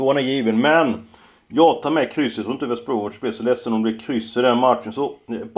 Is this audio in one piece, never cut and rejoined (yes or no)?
yes